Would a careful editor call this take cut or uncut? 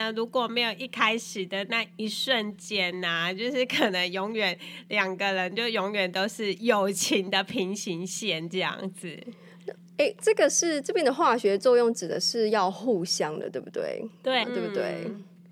cut